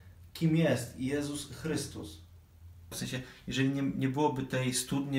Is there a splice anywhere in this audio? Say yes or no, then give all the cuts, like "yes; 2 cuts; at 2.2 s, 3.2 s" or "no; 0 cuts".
yes; 1 cut; at 2.9 s